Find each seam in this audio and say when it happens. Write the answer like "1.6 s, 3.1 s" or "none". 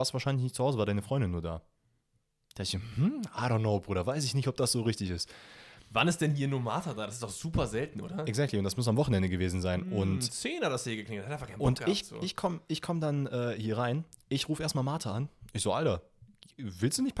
none